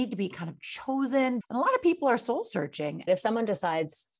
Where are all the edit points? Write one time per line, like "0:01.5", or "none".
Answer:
0:01.4
0:03.1